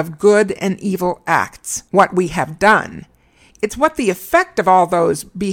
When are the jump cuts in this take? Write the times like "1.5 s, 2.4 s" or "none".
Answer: 1.9 s, 3.5 s